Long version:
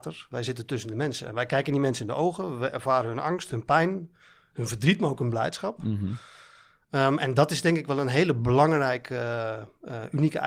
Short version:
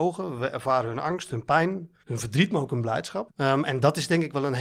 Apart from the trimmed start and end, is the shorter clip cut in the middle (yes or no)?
yes